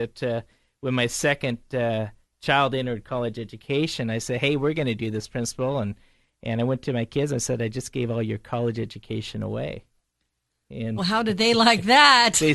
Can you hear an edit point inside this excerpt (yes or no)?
yes